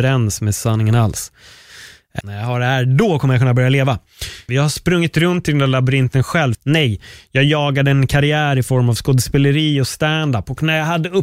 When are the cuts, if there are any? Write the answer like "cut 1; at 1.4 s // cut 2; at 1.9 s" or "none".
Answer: cut 1; at 2.2 s // cut 2; at 4.5 s // cut 3; at 6.5 s